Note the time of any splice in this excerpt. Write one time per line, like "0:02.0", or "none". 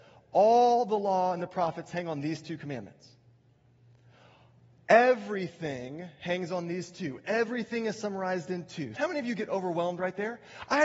0:09.0

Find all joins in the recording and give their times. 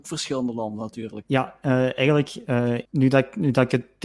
0:01.2
0:02.9

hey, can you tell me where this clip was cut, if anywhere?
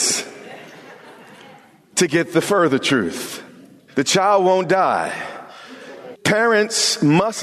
0:03.9
0:06.1

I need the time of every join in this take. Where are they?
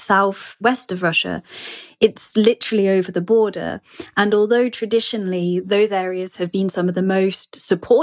none

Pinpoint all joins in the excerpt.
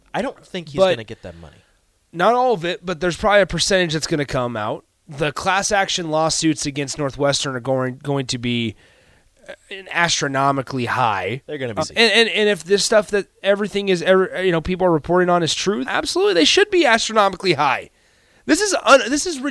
0:11.8
0:15.8

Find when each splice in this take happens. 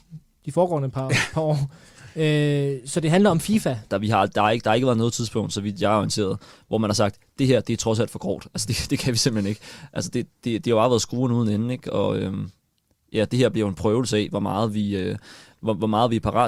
0:03.9

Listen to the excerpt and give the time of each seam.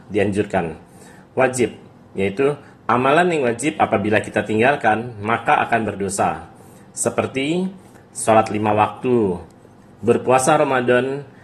none

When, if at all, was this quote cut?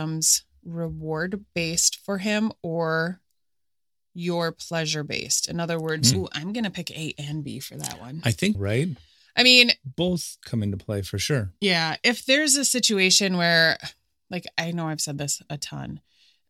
0:06.1
0:08.5

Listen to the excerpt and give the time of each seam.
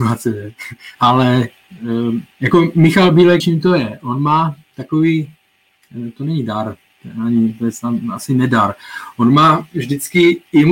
0:00.9
0:02.3
0:03.4

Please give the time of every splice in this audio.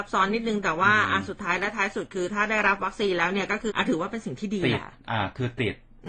0:03.7

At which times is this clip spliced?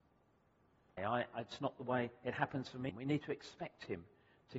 0:01.0
0:02.9

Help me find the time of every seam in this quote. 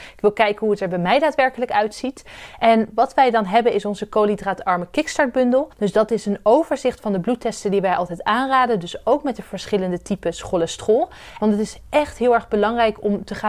0:05.7
0:11.4

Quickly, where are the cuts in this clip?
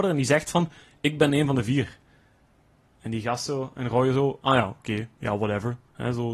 none

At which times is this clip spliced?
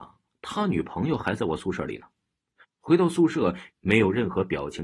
0:02.6
0:03.7

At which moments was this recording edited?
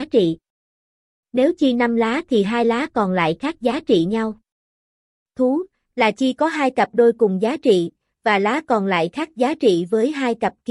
none

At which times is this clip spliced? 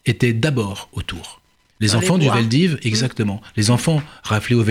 none

